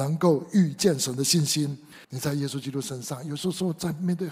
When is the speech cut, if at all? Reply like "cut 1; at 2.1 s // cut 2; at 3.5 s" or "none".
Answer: cut 1; at 2.0 s

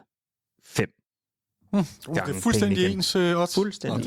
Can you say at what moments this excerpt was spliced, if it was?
none

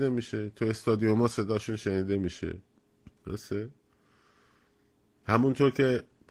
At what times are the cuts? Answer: cut 1; at 3.2 s

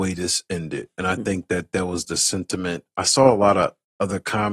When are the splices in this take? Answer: none

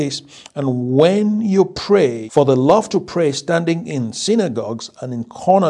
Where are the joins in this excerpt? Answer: cut 1; at 2.3 s

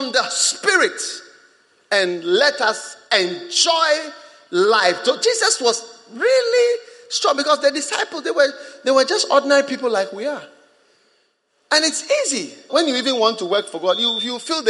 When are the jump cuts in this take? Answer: cut 1; at 12.7 s

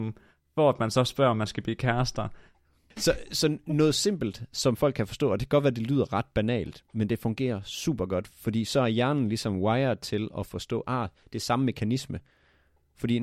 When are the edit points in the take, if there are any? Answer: cut 1; at 2.9 s

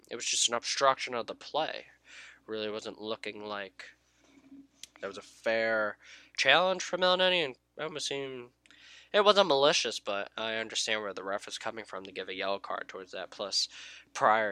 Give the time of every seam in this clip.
cut 1; at 4.9 s

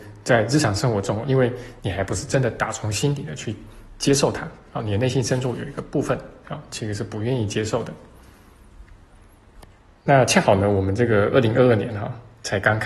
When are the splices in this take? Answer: cut 1; at 1.2 s

